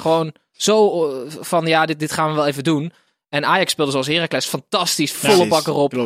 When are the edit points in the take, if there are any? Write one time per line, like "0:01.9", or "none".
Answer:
0:05.1

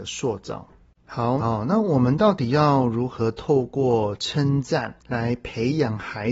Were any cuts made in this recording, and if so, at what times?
0:01.4
0:05.0

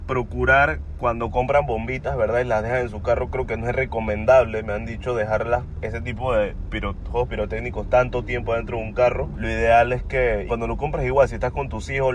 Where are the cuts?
0:06.7
0:09.3
0:10.5

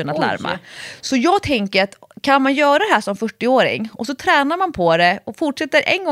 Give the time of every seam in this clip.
none

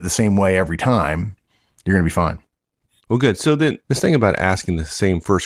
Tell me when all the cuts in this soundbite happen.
none

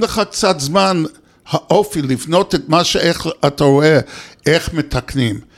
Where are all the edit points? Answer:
none

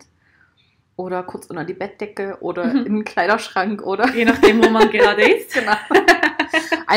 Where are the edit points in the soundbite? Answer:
none

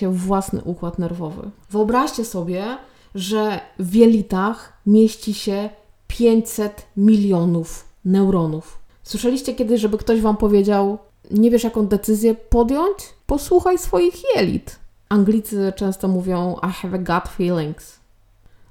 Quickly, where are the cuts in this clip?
0:01.6

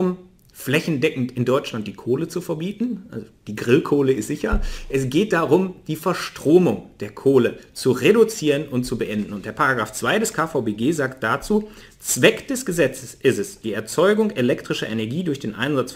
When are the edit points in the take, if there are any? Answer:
none

